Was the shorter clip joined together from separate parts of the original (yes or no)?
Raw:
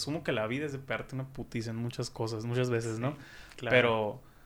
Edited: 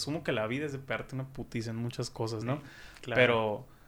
yes